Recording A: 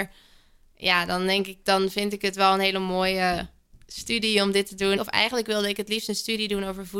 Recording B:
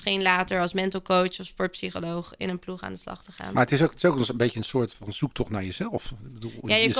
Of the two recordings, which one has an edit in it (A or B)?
A